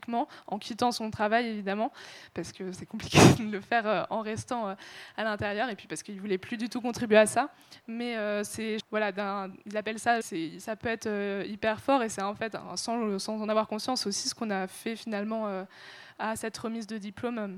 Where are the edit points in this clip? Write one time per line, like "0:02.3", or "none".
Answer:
0:08.8
0:10.2